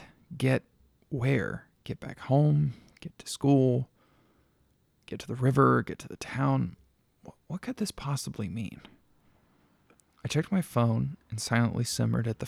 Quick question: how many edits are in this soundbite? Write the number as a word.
zero